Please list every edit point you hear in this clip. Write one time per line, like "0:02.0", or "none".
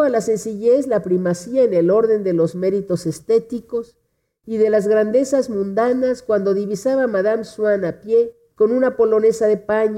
0:08.5